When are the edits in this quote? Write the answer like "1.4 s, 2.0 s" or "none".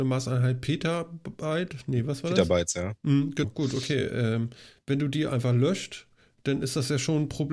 3.4 s